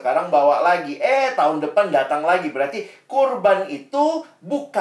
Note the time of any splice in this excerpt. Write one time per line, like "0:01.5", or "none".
none